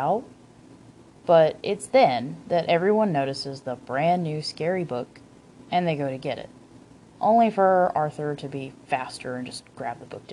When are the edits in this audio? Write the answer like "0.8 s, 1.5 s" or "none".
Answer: none